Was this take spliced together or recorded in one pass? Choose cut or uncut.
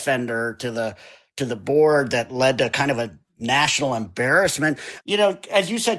cut